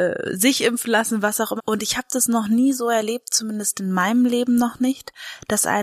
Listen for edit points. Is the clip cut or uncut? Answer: cut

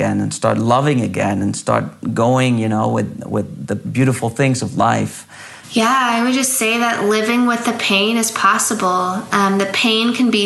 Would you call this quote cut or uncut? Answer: cut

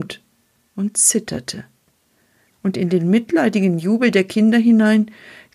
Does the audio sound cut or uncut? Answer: cut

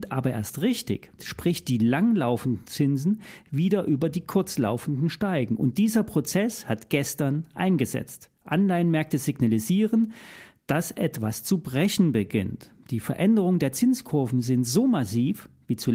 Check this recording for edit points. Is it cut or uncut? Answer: cut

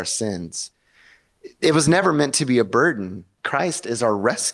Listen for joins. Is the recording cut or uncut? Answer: cut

